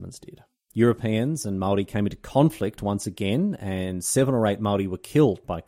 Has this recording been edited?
no; 0 cuts

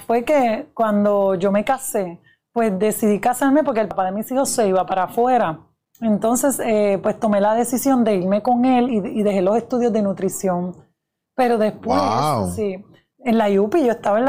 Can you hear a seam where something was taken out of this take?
no; 0 cuts

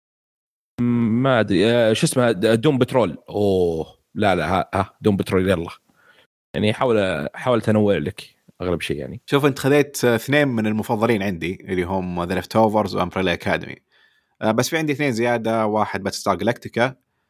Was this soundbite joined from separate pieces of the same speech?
no; 0 cuts

